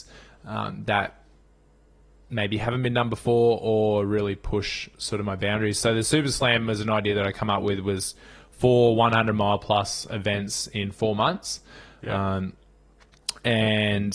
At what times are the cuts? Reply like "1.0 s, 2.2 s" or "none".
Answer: none